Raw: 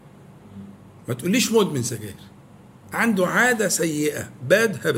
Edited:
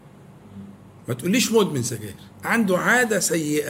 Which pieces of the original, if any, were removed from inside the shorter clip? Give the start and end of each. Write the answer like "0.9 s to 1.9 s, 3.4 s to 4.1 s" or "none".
2.3 s to 2.8 s